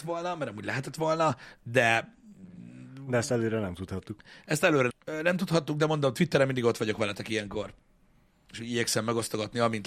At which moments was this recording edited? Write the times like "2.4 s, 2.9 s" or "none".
4.9 s

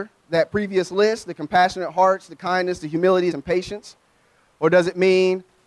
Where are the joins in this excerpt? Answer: 3.3 s

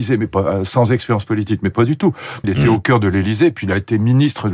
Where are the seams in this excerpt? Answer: 2.4 s

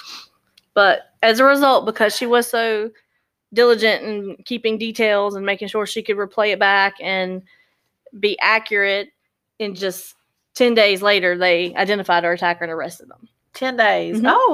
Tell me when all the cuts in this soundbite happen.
none

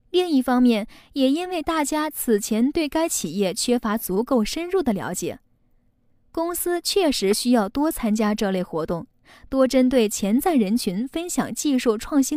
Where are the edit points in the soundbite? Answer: 6.1 s

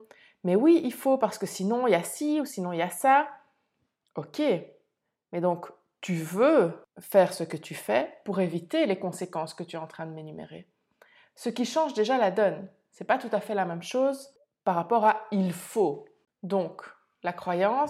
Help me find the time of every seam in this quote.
none

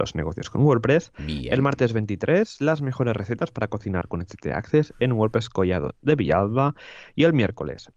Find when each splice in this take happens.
none

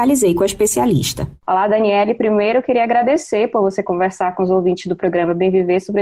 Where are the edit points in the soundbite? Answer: none

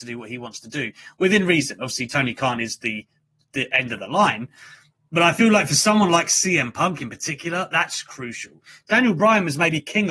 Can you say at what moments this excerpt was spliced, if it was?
none

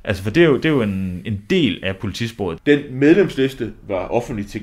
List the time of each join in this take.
1.2 s, 2.6 s

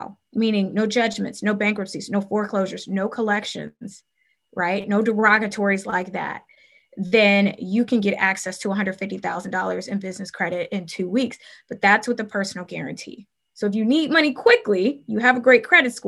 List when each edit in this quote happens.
none

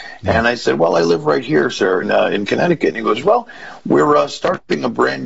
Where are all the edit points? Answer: 2.0 s, 3.2 s

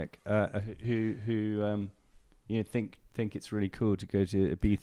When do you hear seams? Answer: none

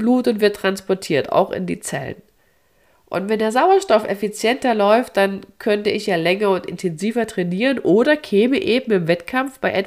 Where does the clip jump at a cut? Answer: none

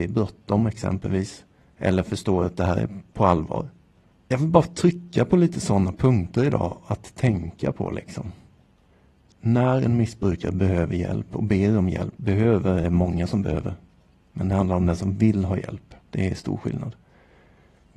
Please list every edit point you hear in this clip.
12.2 s, 16.0 s

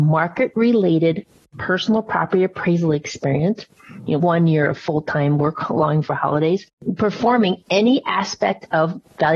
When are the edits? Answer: 4.2 s

